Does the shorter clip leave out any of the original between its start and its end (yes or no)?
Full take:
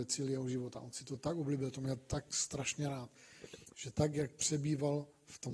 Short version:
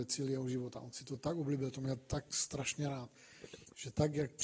no